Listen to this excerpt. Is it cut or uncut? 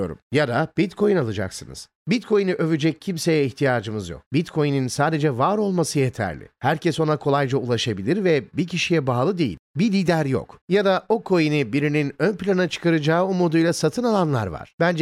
cut